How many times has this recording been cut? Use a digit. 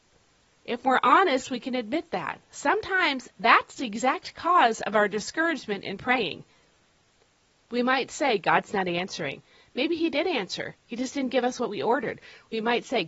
0